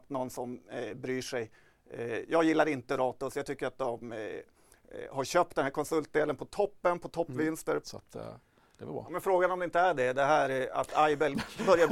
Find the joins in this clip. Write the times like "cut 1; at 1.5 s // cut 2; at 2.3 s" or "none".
cut 1; at 7.8 s